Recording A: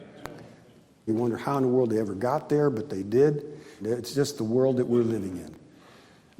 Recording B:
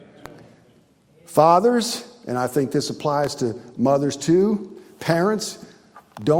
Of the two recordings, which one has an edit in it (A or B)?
A